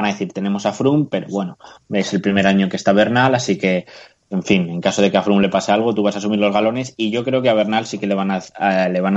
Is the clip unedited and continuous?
yes; 0 cuts

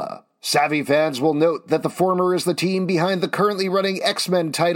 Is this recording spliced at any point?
no; 0 cuts

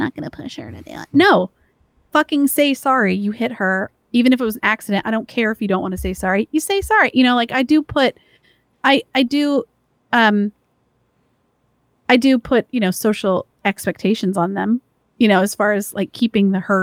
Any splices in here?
no; 0 cuts

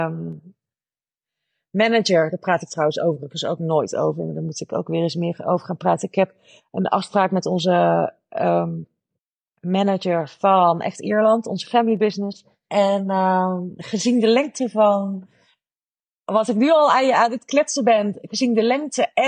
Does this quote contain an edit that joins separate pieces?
yes; 1 cut; at 12.7 s

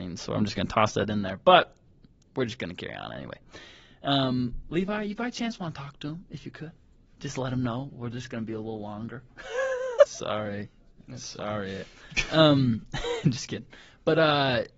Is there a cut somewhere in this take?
yes; 1 cut; at 10.1 s

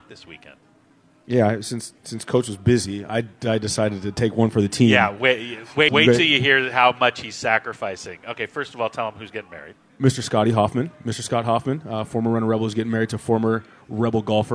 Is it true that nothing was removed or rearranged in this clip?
no; 1 cut; at 5.9 s

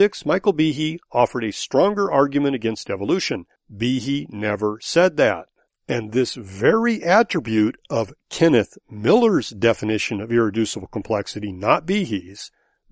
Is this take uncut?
no; 1 cut; at 3.6 s

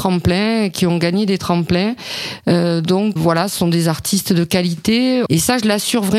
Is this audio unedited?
no; 2 cuts; at 3.2 s, 5.3 s

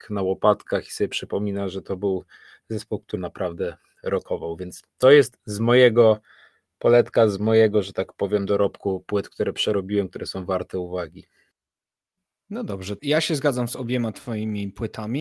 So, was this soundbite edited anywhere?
yes; 1 cut; at 3.2 s

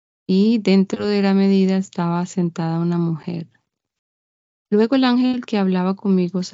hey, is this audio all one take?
no; 1 cut; at 4.6 s

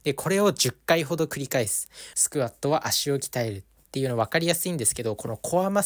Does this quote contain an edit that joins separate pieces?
yes; 1 cut; at 2.1 s

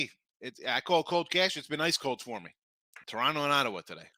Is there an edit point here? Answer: yes; 1 cut; at 3.0 s

